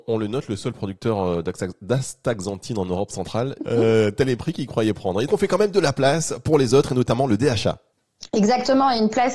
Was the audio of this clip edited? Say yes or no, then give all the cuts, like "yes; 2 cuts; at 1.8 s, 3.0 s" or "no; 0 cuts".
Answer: yes; 2 cuts; at 3.6 s, 5.3 s